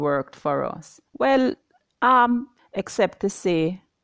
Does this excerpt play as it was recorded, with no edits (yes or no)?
no